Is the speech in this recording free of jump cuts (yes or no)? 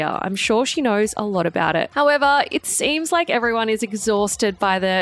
yes